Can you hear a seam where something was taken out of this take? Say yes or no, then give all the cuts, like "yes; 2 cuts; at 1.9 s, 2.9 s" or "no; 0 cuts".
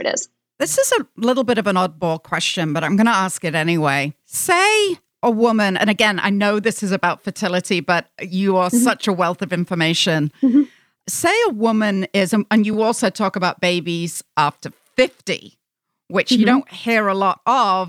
no; 0 cuts